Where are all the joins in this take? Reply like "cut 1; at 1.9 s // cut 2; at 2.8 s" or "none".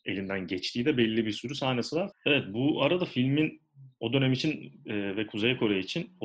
cut 1; at 2.1 s